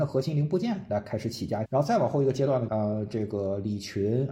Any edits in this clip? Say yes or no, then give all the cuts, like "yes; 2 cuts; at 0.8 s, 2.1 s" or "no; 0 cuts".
yes; 2 cuts; at 1.7 s, 2.7 s